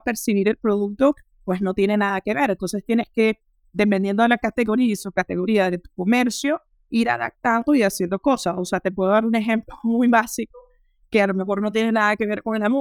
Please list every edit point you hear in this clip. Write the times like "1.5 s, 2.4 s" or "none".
none